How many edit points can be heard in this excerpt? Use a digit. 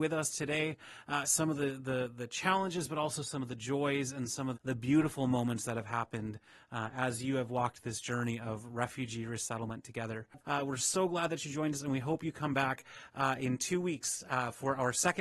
3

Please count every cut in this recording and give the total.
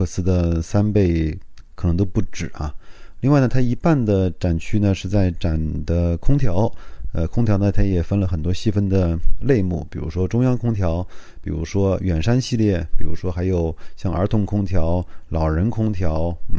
0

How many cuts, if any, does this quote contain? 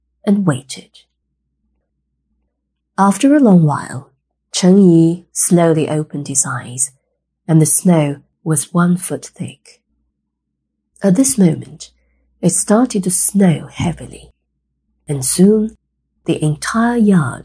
1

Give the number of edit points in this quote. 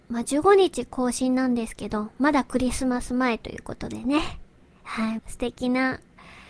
1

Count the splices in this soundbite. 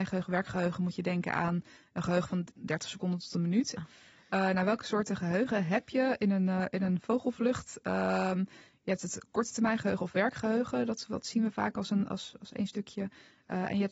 1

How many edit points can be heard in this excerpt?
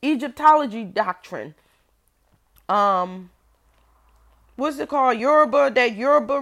0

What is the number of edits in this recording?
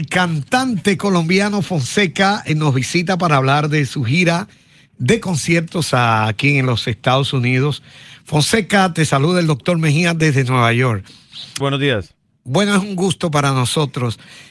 1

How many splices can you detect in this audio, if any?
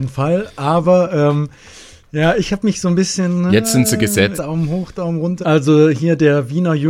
2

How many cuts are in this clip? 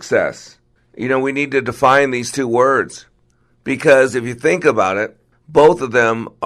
0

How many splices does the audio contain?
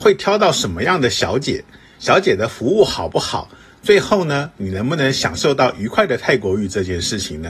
0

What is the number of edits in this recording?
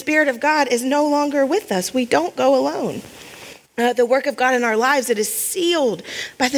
1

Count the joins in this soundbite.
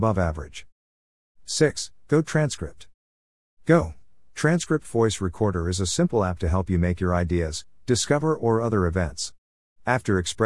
0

